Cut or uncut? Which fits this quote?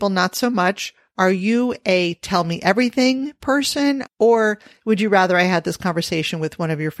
cut